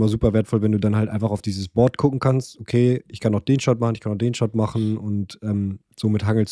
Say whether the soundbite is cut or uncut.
uncut